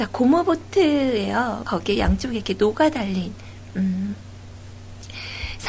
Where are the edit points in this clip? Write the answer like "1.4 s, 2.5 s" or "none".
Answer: 1.6 s